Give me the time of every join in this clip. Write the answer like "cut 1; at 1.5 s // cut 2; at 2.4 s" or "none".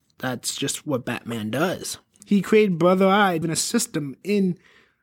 cut 1; at 2.2 s // cut 2; at 3.4 s